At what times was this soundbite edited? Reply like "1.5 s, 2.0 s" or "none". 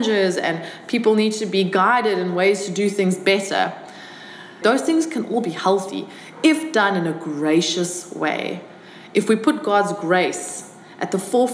4.6 s